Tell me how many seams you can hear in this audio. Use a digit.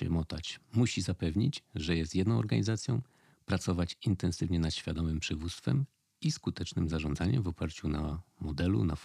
0